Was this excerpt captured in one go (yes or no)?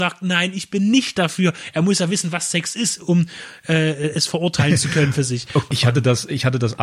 no